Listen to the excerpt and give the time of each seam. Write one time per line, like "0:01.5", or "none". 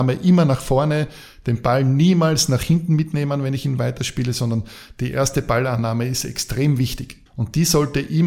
0:07.3

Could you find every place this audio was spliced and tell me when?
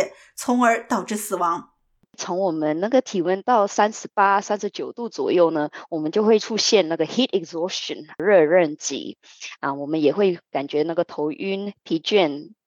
none

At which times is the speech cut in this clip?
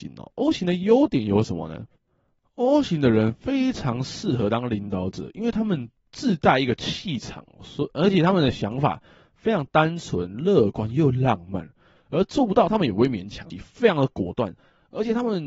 0:12.0
0:13.5

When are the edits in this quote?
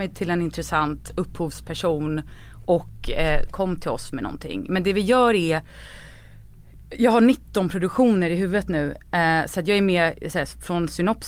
0:03.5

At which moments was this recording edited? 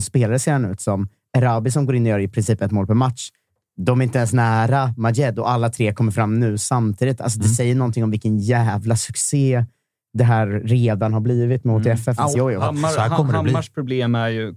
0:12.3

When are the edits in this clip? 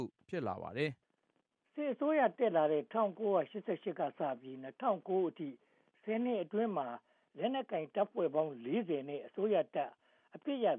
0:01.0

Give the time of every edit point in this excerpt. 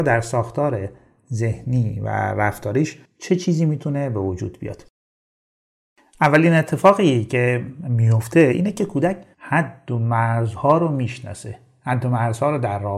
0:09.3

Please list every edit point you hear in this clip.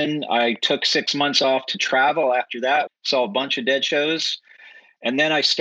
0:02.9

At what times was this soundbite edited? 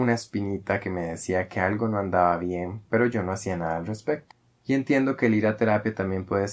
0:04.6

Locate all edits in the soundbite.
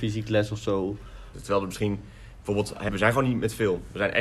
0:01.3
0:02.9

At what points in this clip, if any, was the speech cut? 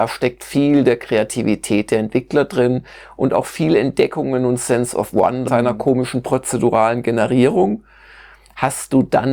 0:05.5

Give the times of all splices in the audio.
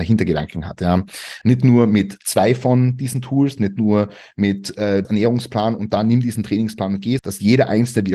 0:01.4
0:05.0
0:07.2

